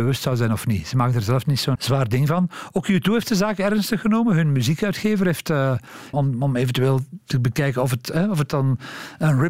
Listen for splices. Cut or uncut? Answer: cut